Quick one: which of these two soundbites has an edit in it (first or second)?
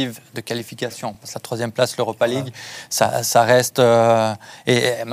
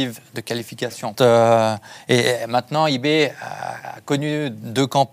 second